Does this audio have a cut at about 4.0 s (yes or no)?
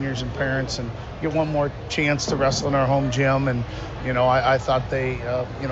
yes